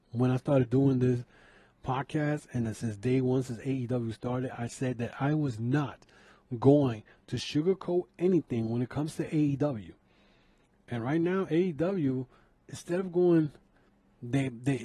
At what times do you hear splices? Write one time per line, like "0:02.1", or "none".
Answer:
none